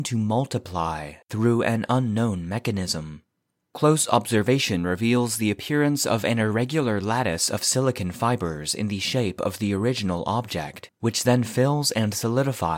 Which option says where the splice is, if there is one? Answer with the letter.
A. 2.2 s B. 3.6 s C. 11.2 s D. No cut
D